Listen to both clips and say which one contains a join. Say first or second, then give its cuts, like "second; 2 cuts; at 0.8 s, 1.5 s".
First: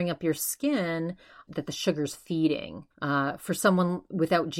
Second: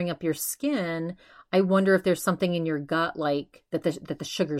first; 2 cuts; at 1.5 s, 2.9 s